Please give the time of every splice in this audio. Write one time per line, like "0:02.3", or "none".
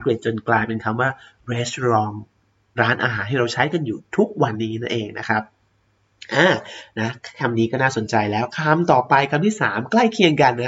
0:04.5

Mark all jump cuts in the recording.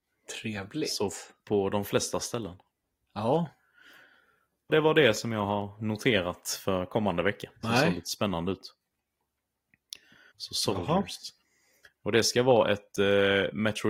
0:04.7
0:07.6
0:10.3

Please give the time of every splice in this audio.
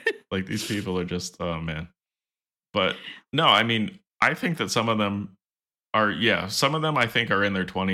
none

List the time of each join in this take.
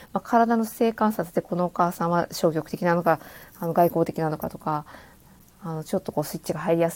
none

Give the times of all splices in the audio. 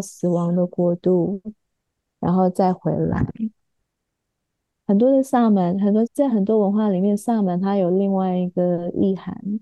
0:06.1

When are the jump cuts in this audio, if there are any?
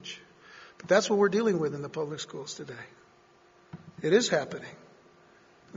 none

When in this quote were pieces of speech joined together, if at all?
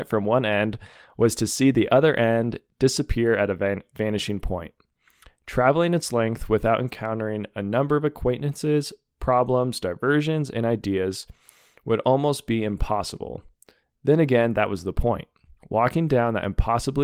none

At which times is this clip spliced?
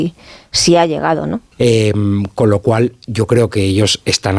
0:01.5

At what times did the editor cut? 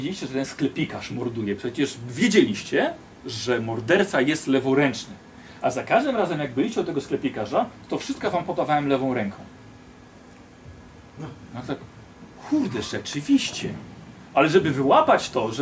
none

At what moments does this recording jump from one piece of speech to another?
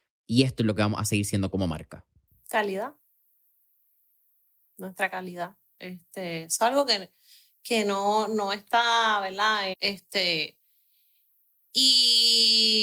0:09.7

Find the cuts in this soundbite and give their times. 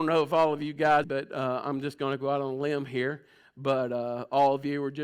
0:01.0

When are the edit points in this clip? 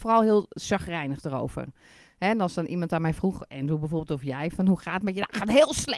none

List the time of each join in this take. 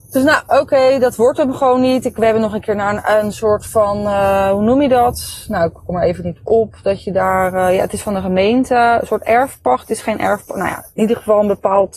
none

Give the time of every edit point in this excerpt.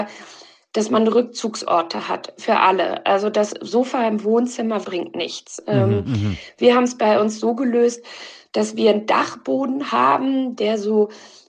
0:04.8

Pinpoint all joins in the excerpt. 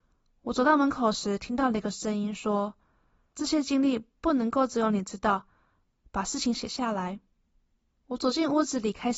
none

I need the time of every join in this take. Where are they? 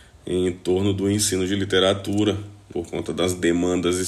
0:02.7

